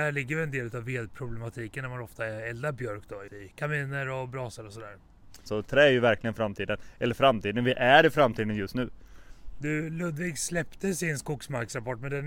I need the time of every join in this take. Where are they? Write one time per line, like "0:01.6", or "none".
0:03.3
0:05.5